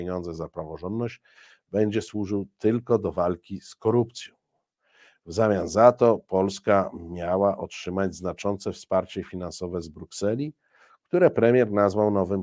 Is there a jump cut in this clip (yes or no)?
no